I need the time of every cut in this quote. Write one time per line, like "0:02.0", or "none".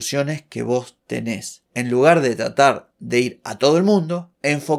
none